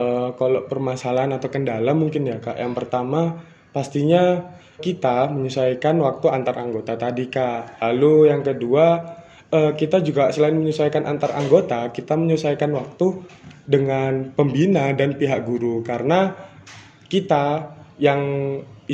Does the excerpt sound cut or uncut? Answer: cut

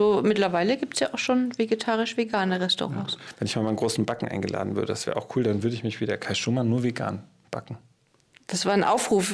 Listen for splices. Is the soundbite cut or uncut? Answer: uncut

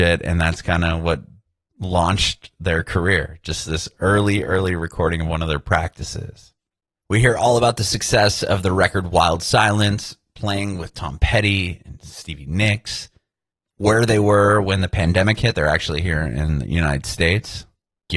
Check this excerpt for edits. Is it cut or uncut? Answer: uncut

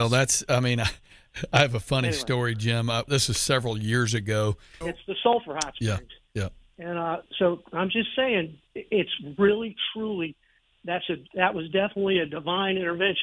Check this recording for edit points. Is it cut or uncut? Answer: cut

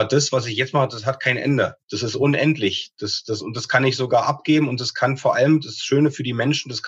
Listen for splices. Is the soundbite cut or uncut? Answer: cut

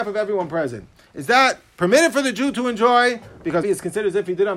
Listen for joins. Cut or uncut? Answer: cut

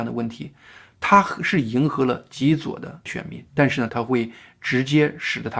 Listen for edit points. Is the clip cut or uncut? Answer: cut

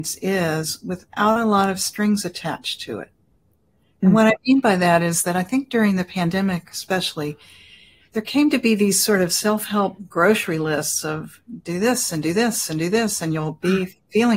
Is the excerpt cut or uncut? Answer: uncut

